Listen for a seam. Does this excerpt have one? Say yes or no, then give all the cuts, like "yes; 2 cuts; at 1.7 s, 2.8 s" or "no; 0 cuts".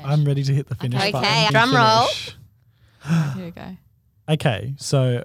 yes; 1 cut; at 1.5 s